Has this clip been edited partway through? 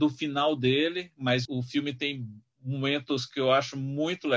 yes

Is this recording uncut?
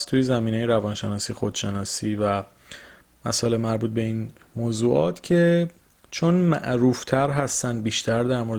yes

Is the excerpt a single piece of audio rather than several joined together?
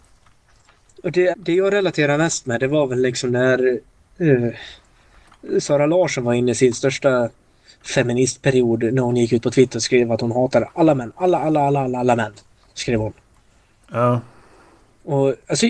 no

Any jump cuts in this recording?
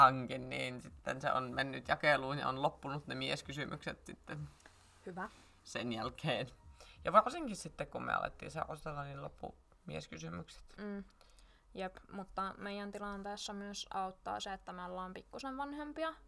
no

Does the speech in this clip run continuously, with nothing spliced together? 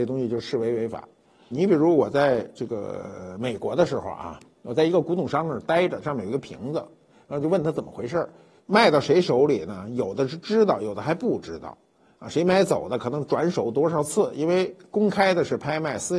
no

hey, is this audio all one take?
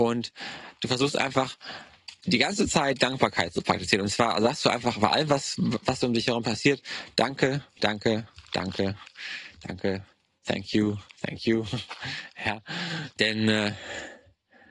no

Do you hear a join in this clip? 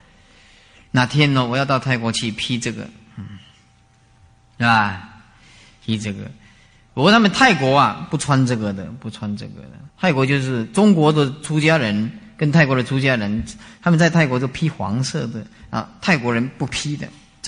yes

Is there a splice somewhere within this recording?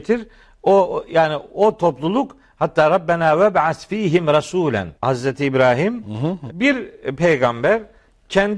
yes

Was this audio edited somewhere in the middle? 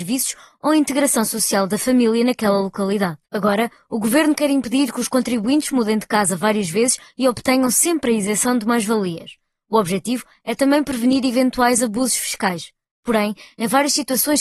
yes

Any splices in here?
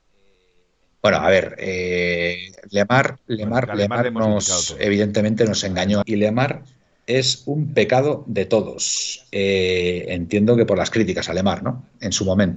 yes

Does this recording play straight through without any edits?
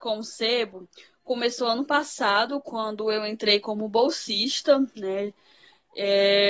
yes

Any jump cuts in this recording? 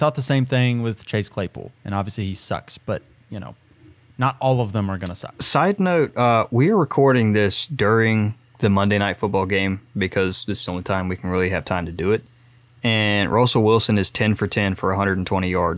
no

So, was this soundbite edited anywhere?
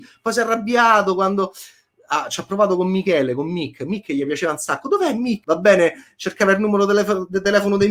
yes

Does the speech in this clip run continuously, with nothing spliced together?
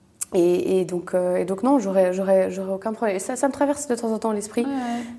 yes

